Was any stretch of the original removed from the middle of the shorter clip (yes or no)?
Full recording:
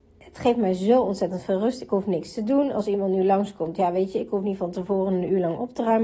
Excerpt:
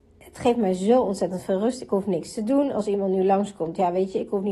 no